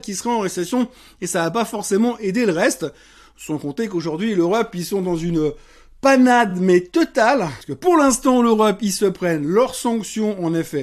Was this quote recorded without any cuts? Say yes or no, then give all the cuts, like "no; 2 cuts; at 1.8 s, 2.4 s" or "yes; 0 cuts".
yes; 0 cuts